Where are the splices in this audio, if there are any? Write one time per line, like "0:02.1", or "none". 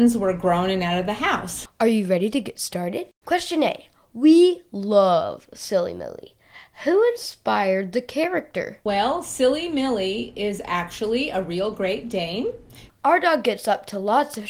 0:01.7
0:03.2
0:12.9